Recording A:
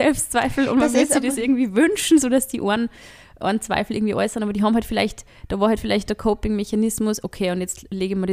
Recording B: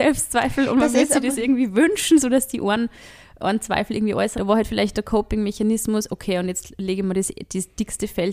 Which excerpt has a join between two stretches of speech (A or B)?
B